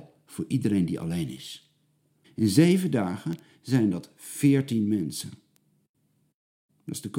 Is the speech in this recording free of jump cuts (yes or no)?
no